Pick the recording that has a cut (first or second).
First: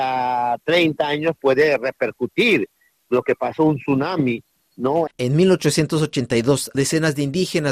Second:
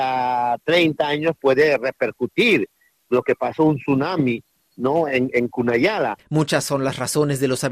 first